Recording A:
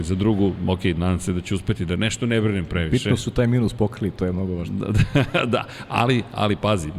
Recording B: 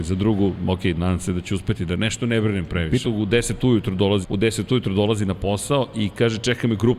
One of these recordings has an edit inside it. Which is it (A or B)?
B